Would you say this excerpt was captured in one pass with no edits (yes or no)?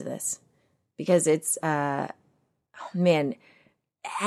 yes